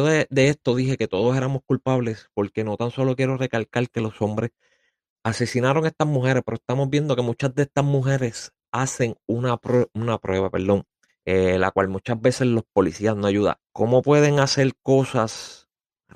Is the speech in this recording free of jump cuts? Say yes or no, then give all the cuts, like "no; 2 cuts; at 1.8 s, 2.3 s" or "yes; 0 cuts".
no; 2 cuts; at 11.1 s, 13.6 s